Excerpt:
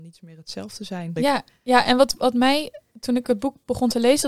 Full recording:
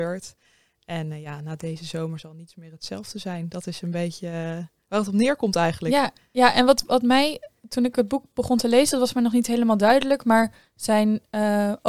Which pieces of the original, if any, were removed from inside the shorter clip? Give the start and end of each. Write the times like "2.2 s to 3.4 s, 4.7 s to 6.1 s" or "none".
3.5 s to 5.8 s